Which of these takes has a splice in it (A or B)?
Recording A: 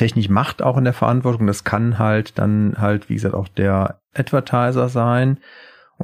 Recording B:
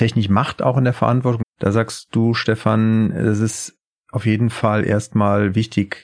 B